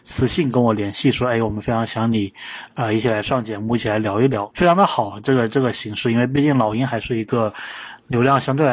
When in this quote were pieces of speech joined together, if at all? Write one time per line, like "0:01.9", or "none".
0:04.5